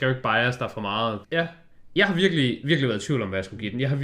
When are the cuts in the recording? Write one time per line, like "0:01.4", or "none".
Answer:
0:01.2